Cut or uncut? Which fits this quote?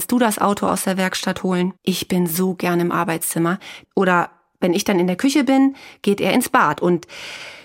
cut